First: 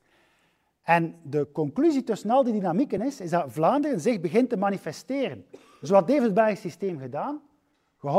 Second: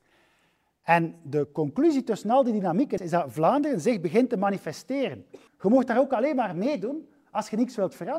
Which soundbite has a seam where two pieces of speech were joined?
second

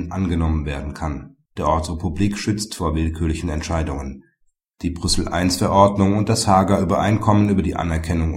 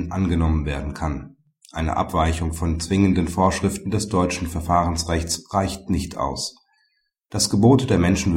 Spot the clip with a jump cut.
first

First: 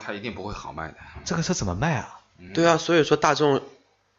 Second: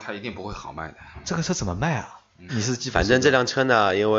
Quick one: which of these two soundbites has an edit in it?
second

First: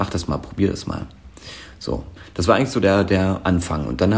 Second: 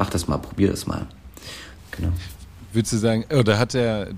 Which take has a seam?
second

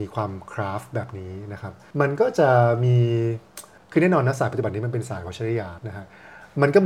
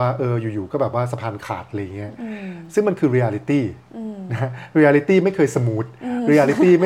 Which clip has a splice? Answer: first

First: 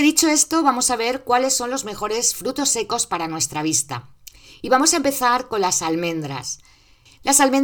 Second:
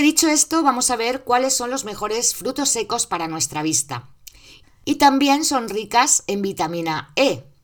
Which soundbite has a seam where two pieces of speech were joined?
second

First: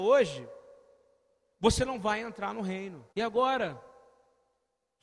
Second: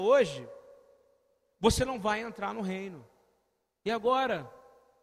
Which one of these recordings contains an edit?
first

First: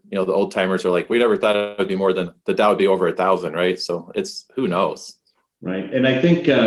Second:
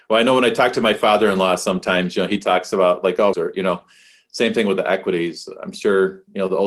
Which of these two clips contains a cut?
second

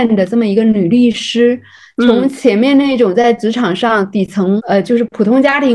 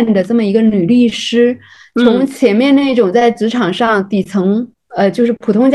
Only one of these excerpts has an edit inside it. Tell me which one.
first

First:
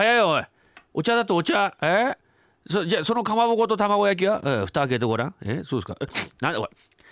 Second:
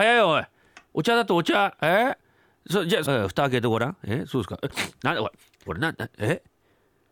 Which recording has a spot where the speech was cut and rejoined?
second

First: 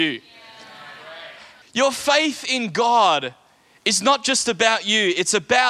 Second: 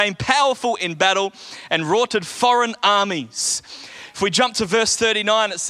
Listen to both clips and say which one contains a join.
first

